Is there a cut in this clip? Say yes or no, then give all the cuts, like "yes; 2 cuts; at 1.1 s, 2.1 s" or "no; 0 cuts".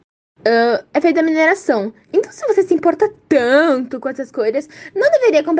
no; 0 cuts